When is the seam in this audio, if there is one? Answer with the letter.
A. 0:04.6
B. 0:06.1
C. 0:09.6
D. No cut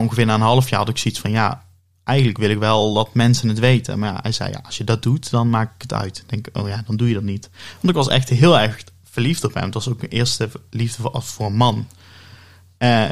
D